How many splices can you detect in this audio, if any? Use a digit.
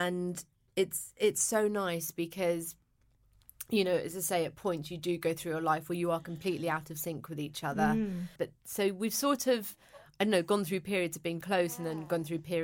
2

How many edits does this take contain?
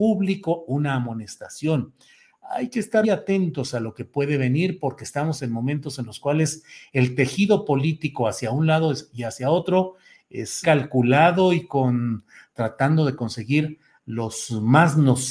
2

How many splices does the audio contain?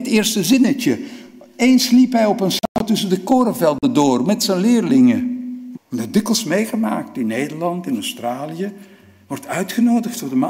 1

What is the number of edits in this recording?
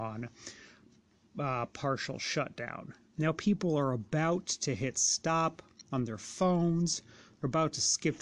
1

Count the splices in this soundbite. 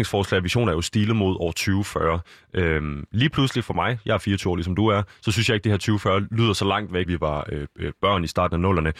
1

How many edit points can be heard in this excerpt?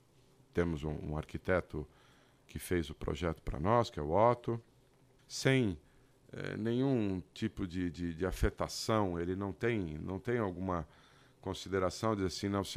1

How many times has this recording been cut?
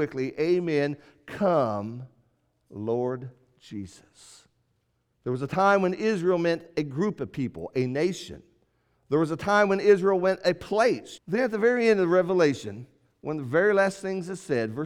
2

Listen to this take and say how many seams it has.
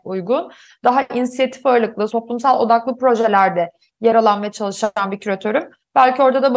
1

